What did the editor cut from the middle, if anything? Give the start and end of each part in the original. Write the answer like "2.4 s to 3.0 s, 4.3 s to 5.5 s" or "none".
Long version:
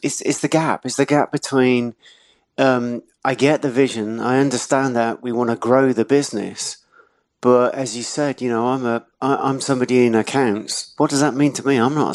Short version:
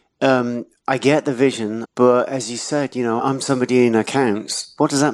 4.2 s to 7.3 s, 8.6 s to 9.4 s